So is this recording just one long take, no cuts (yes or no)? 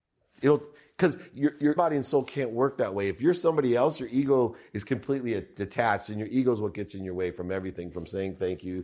no